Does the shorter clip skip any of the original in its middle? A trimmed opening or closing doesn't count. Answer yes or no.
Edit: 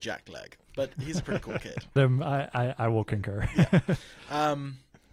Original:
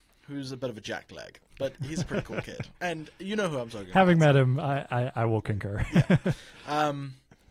yes